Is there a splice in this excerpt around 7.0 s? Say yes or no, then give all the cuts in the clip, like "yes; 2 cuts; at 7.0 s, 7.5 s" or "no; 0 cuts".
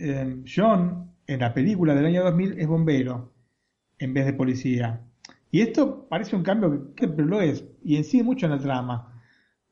yes; 1 cut; at 7.0 s